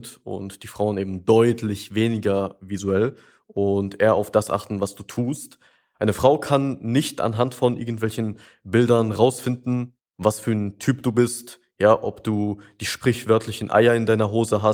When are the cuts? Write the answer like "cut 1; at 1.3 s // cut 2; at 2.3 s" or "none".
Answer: cut 1; at 5.9 s